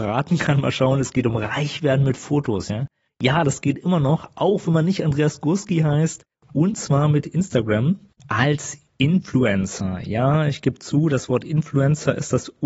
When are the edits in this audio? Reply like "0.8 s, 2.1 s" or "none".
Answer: none